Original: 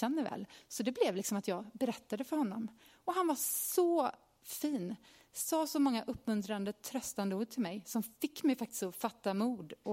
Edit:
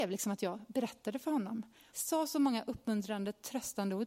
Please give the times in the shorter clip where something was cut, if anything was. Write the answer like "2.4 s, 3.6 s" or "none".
1.9 s